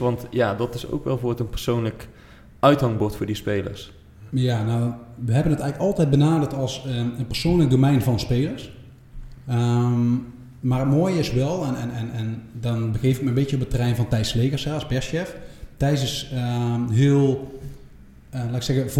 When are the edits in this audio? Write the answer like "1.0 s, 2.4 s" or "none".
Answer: none